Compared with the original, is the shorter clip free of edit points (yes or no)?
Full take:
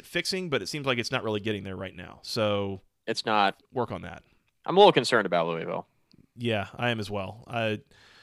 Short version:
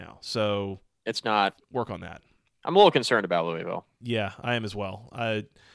no